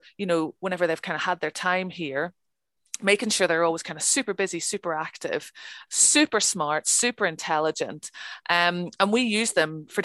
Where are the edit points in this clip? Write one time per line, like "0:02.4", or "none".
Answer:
0:05.9